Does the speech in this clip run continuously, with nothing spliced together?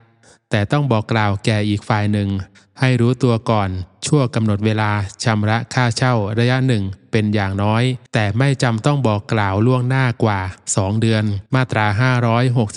no; 2 cuts; at 8.1 s, 11.5 s

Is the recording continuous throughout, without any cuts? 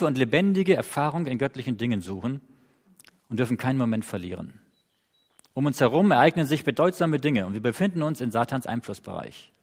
yes; 0 cuts

